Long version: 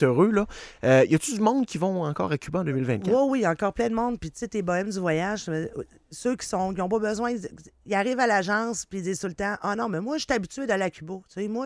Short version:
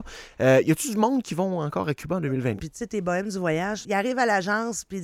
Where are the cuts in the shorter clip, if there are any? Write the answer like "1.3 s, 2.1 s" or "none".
2.6 s, 3.8 s